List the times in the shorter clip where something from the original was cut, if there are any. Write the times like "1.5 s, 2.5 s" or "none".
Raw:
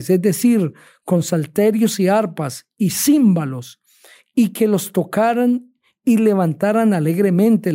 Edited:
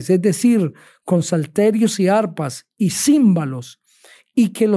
none